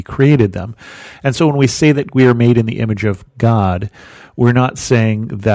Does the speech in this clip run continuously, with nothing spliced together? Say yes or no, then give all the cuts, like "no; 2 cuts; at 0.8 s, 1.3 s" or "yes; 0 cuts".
yes; 0 cuts